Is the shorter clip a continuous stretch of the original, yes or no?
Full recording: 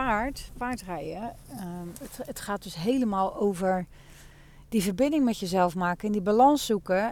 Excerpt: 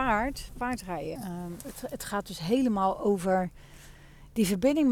no